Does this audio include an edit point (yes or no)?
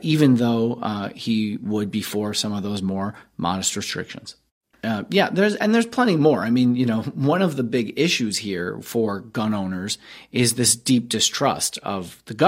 yes